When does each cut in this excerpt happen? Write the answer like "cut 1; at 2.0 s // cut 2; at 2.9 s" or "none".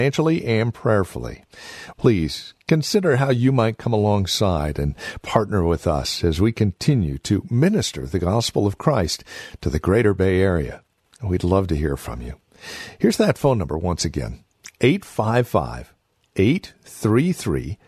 cut 1; at 1.9 s